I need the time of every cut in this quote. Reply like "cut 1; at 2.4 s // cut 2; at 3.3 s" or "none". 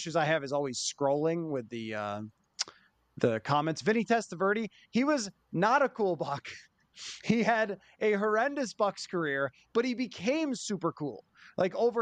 none